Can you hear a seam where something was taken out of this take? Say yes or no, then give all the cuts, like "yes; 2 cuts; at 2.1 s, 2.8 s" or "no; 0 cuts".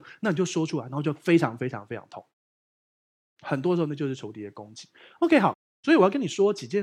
no; 0 cuts